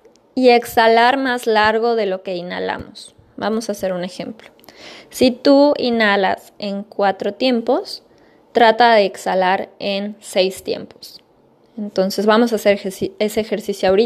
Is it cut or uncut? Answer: uncut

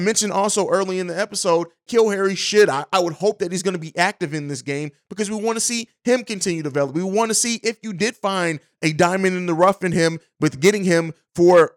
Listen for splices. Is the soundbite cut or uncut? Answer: cut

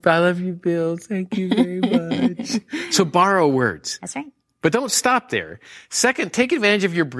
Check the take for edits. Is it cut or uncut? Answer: uncut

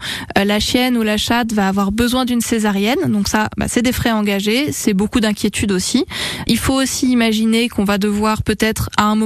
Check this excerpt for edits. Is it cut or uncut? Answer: uncut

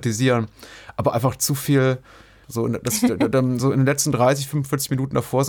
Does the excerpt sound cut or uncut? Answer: cut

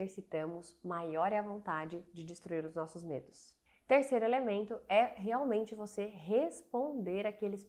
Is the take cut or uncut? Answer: uncut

